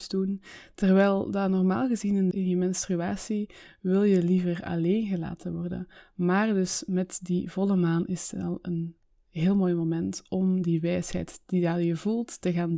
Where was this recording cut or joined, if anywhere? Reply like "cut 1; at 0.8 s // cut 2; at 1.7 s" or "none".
cut 1; at 2.3 s